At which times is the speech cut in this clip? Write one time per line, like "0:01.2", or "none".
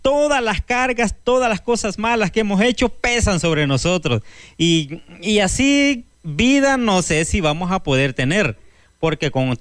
0:06.1